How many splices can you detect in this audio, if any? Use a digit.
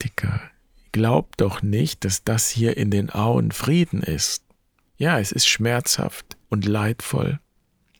2